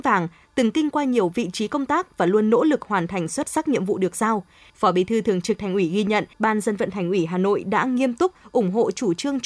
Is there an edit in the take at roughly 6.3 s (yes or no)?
yes